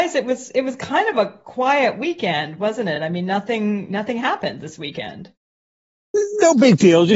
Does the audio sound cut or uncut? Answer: uncut